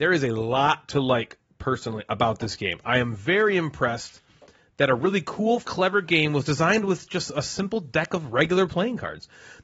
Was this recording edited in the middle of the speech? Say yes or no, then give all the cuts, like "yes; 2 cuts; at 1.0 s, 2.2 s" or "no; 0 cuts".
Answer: yes; 1 cut; at 5.6 s